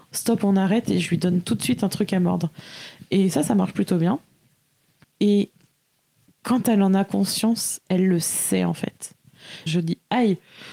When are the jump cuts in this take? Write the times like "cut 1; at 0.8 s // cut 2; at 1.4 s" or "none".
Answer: cut 1; at 5.0 s // cut 2; at 9.7 s